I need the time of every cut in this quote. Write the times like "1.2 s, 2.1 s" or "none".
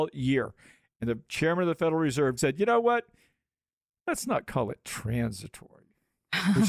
2.4 s